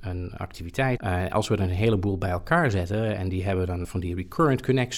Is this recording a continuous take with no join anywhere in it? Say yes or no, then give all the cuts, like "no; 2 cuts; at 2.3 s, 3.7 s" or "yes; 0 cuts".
no; 2 cuts; at 1.0 s, 3.8 s